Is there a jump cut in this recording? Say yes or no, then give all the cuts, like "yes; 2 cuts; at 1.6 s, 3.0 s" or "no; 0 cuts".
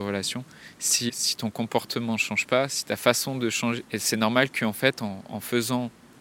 yes; 2 cuts; at 1.1 s, 3.8 s